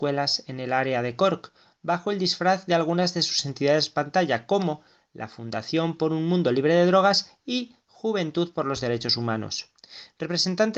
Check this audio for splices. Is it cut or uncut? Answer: uncut